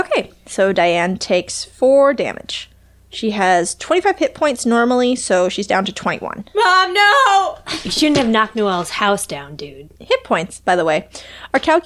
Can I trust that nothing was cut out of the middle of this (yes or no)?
no